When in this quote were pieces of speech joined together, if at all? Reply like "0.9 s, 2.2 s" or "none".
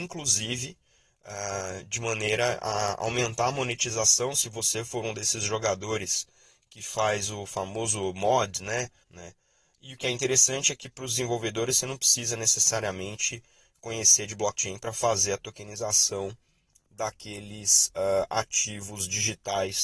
9.0 s